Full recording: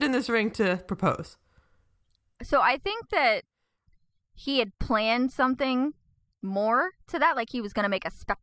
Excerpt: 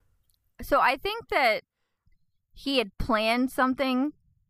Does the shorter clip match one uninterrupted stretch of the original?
yes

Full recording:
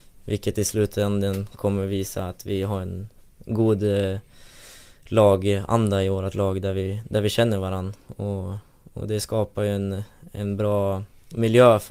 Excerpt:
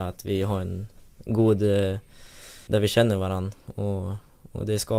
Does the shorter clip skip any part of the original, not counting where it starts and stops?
yes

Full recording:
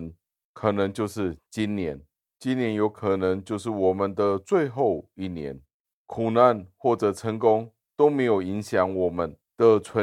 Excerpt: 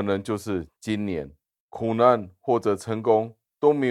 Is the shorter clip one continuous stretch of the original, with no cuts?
no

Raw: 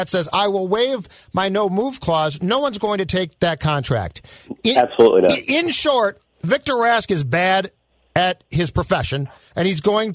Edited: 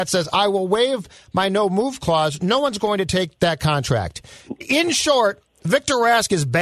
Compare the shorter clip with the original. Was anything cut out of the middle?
yes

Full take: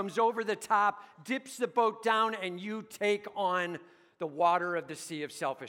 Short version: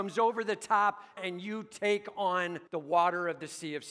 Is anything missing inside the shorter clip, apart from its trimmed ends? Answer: yes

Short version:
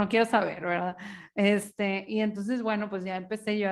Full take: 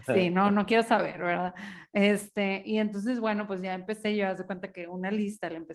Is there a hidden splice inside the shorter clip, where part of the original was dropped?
no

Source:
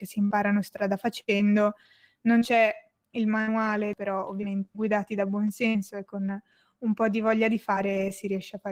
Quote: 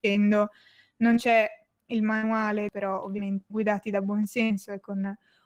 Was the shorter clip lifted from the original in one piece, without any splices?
yes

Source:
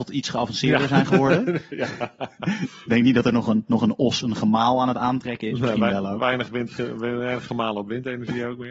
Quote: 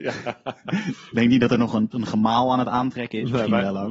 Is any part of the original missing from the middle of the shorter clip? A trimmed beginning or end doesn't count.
yes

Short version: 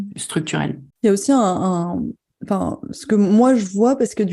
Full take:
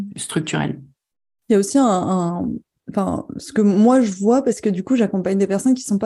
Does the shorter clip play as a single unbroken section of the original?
no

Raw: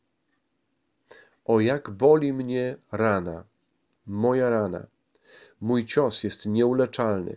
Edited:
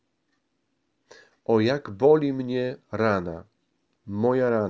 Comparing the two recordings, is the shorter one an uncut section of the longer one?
yes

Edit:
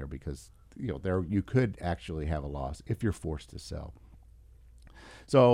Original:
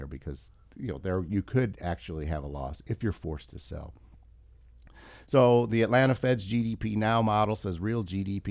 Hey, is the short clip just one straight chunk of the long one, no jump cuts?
yes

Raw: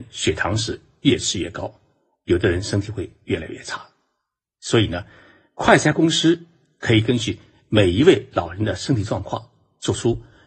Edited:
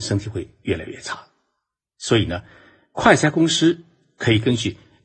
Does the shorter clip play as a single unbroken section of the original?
yes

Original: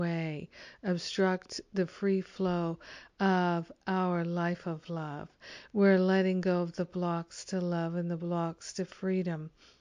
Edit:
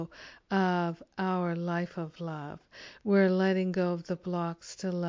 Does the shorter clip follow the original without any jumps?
yes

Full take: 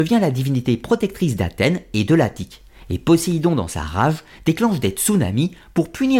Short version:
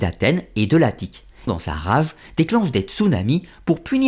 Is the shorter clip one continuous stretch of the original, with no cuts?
no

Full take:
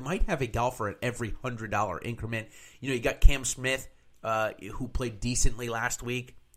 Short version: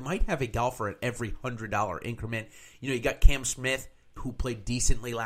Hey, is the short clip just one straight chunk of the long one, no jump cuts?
no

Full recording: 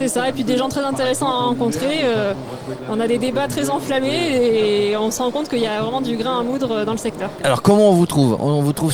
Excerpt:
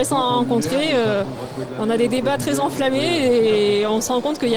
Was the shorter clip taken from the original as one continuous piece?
yes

